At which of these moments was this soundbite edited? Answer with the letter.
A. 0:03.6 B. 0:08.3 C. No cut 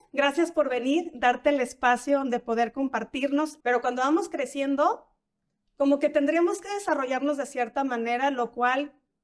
A